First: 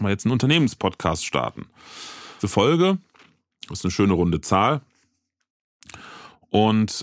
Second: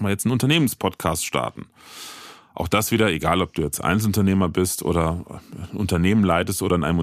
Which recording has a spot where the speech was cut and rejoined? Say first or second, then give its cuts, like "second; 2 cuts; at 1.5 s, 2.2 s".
first; 1 cut; at 2.4 s